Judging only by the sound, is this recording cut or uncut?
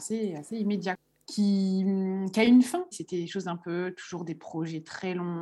cut